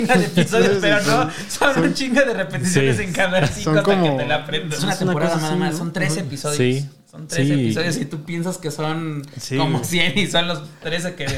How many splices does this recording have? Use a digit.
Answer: 1